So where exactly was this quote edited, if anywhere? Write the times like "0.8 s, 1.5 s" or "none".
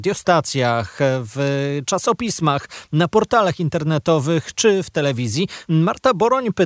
5.7 s